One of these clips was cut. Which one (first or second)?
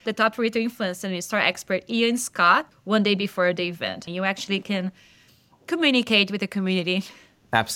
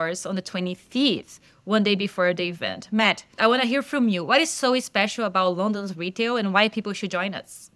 first